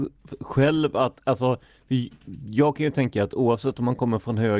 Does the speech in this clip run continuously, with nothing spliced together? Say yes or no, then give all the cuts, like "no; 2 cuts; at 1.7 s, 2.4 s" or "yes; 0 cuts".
yes; 0 cuts